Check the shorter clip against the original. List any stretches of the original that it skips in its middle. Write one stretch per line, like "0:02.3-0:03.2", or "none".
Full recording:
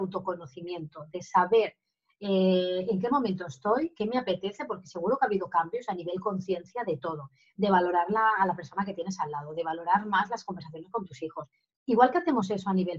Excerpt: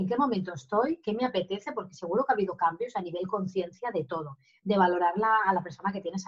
none